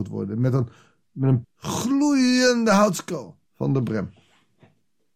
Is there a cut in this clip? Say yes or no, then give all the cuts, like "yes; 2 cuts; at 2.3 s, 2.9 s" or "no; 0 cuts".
yes; 2 cuts; at 1.4 s, 3.5 s